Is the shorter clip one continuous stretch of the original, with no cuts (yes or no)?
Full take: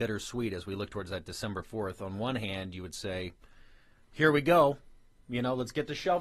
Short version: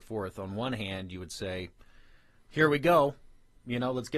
yes